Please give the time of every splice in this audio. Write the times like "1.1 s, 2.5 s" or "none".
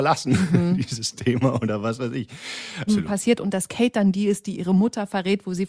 2.9 s